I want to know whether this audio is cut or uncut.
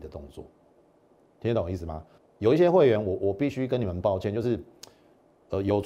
cut